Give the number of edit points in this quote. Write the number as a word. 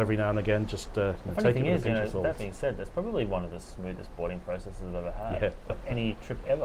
zero